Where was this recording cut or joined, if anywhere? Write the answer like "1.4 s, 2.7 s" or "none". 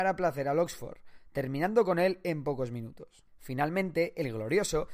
3.3 s